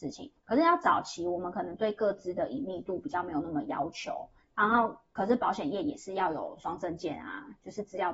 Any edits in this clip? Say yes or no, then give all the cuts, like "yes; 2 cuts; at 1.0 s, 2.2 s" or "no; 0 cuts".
no; 0 cuts